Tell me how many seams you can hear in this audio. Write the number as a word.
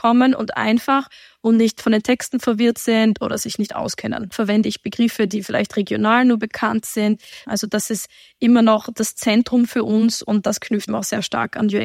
three